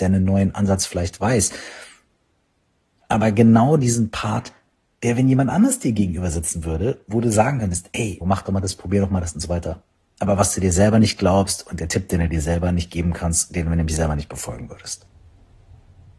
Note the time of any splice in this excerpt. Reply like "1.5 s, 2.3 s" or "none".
8.2 s